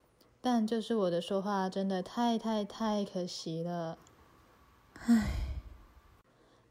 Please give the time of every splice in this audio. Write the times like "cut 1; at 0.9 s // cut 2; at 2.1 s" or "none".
none